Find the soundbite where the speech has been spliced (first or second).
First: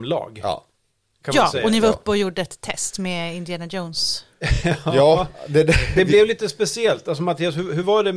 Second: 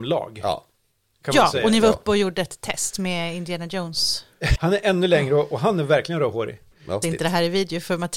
second